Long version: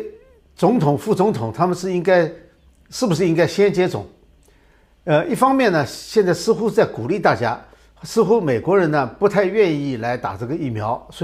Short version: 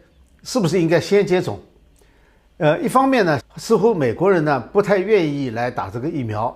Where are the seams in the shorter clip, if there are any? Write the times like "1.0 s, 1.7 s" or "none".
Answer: 3.4 s